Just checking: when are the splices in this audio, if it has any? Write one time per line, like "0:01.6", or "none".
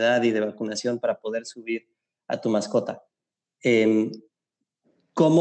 none